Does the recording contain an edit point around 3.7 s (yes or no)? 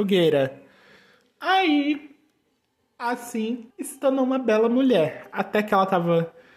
yes